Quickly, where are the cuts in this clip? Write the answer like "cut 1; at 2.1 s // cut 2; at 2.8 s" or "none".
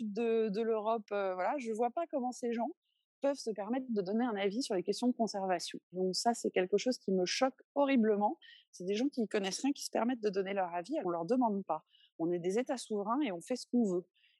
cut 1; at 5.9 s // cut 2; at 11.0 s